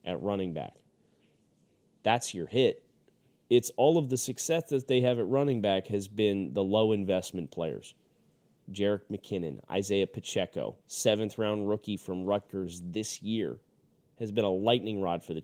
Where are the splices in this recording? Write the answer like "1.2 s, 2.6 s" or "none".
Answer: 3.4 s, 10.8 s